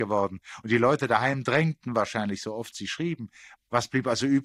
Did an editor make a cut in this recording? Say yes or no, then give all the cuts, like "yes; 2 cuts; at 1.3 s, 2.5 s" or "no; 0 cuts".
no; 0 cuts